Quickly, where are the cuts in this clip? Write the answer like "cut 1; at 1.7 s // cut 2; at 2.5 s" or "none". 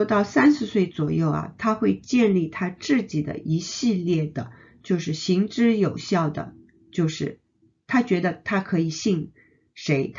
none

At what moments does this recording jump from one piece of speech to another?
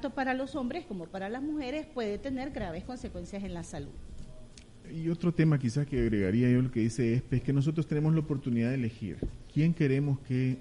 cut 1; at 4.8 s

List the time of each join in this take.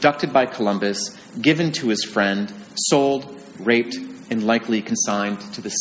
cut 1; at 3.5 s

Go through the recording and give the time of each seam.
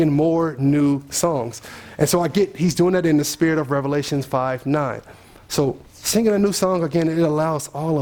cut 1; at 5.9 s

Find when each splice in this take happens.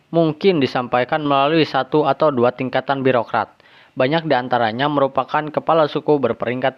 none

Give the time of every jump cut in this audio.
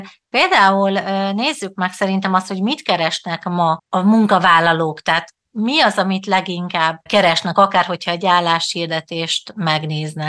none

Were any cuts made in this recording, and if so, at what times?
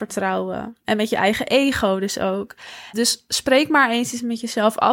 cut 1; at 2.9 s

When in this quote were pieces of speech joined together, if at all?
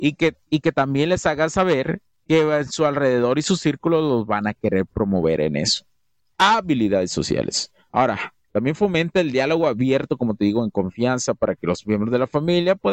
cut 1; at 6.3 s

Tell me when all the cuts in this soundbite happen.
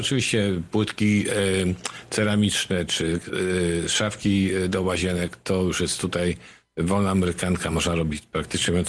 none

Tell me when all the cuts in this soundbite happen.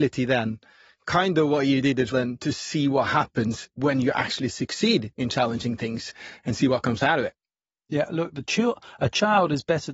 cut 1; at 2.1 s

